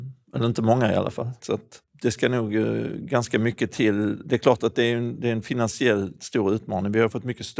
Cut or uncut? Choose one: cut